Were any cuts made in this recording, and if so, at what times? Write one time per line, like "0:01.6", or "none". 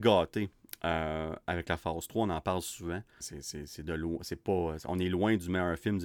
0:03.2